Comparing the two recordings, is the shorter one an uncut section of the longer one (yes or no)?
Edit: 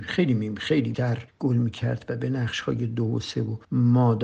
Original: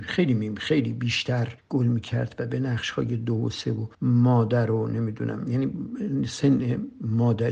no